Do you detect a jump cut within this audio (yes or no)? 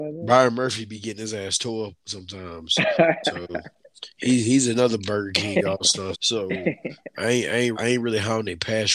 yes